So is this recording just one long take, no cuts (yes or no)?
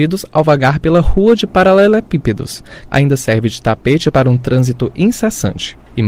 no